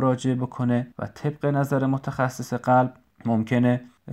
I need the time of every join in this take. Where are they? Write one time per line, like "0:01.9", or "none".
0:00.9